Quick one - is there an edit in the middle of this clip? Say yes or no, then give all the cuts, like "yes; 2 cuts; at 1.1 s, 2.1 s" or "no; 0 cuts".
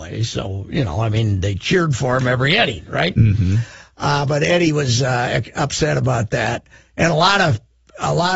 no; 0 cuts